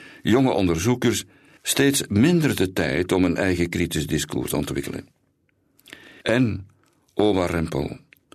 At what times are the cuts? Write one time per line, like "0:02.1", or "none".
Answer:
0:01.6
0:06.2